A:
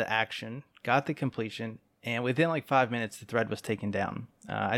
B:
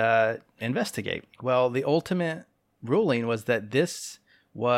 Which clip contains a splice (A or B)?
B